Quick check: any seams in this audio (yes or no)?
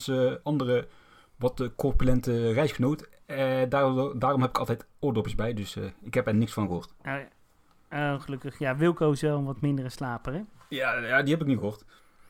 no